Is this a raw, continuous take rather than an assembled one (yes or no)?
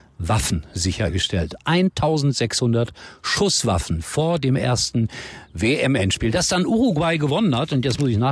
yes